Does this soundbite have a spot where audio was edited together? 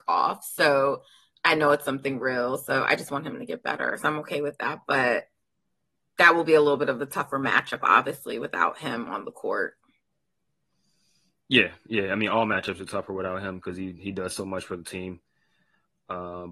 no; 0 cuts

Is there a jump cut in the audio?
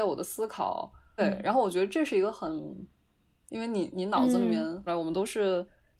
yes; 3 cuts; at 1.2 s, 3.5 s, 4.9 s

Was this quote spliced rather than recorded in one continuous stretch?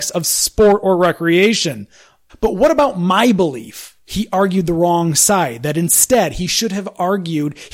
yes; 1 cut; at 2.3 s

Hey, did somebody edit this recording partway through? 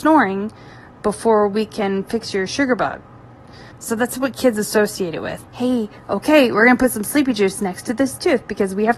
yes; 2 cuts; at 3.7 s, 5.4 s

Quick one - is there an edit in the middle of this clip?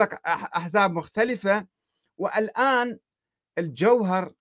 no; 0 cuts

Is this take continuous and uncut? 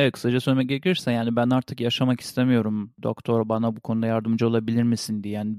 yes; 0 cuts

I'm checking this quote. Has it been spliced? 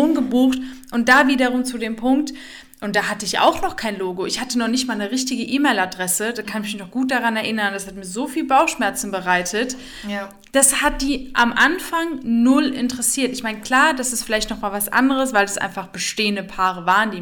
no; 0 cuts

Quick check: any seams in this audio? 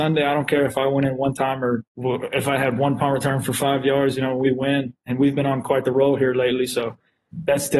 yes; 1 cut; at 1.9 s

